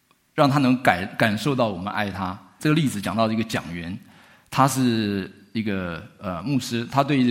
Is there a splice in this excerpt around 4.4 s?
no; 1 cut; at 2.6 s

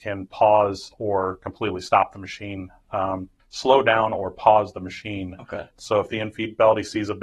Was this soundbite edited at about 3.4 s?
yes; 2 cuts; at 3.4 s, 5.7 s

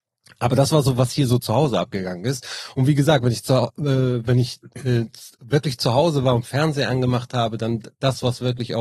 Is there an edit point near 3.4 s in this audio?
no; 0 cuts

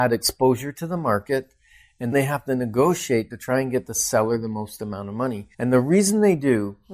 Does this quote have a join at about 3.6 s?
no; 2 cuts; at 2.1 s, 5.5 s

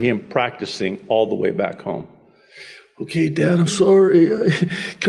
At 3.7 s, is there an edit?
yes; 1 cut; at 3.7 s

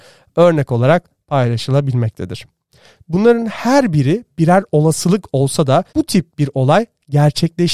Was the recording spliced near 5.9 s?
yes; 2 cuts; at 3.0 s, 5.9 s

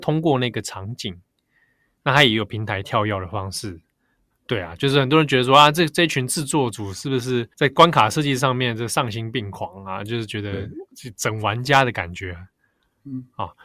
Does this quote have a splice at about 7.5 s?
yes; 2 cuts; at 4.3 s, 7.5 s

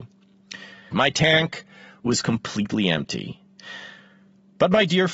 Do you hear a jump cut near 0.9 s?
yes; 1 cut; at 0.9 s

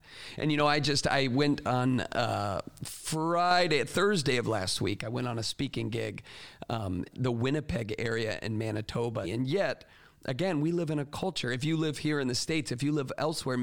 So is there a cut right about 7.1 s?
yes; 2 cuts; at 7.1 s, 9.2 s

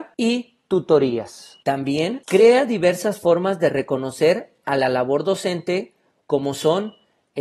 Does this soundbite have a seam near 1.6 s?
yes; 1 cut; at 1.6 s

